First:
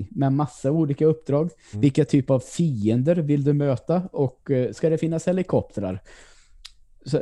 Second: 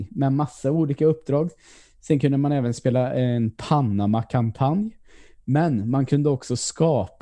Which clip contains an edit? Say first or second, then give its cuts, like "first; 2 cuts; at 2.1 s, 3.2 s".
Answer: first; 2 cuts; at 1.7 s, 4.7 s